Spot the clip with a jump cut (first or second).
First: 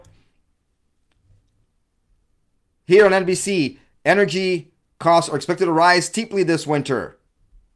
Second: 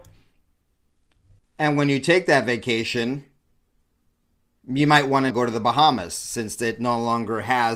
second